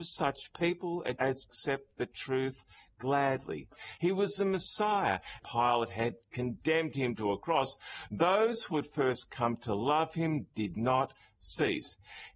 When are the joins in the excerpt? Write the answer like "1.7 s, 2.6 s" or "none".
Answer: 4.0 s, 5.4 s